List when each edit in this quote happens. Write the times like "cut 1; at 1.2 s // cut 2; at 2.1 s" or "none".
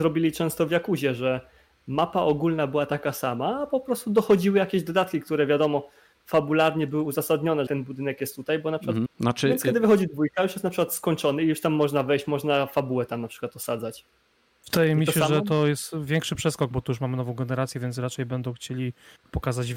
cut 1; at 7.7 s // cut 2; at 9.1 s